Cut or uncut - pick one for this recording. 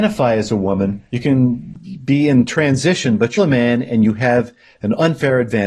cut